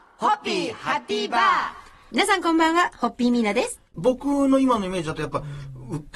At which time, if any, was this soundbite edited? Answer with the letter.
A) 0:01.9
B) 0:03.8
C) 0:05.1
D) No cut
B